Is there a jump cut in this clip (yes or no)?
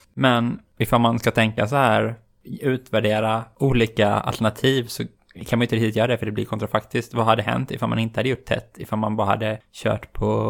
no